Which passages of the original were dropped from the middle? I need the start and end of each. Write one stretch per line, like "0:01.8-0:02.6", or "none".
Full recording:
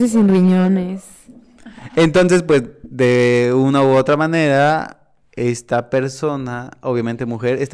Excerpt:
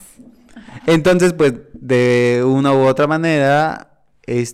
none